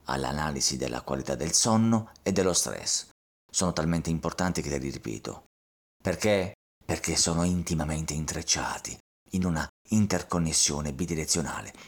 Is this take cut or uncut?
cut